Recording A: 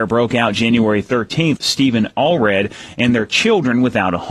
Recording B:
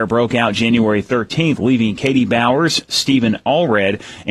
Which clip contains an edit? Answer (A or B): A